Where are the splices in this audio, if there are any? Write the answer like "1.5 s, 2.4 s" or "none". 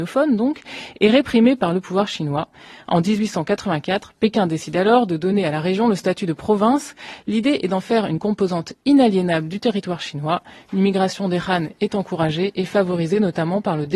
none